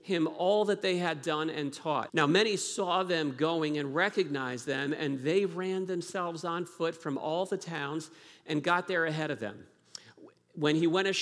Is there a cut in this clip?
yes; 1 cut; at 2.1 s

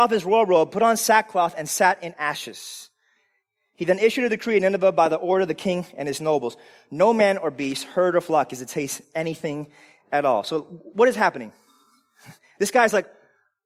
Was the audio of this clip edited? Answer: no; 0 cuts

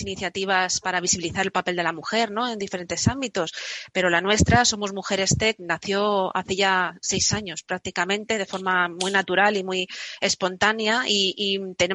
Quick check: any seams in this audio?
no; 0 cuts

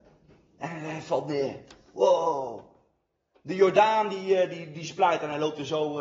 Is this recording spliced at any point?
no; 0 cuts

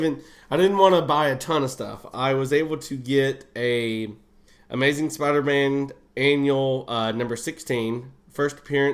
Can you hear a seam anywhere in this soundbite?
no; 0 cuts

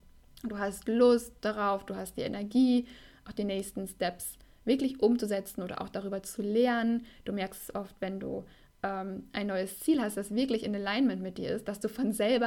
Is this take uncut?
yes; 0 cuts

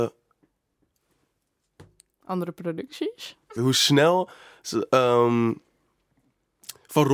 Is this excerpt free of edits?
no; 1 cut; at 3.6 s

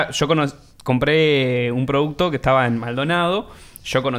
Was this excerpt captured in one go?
yes; 0 cuts

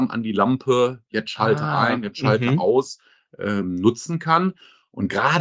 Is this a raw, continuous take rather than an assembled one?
yes; 0 cuts

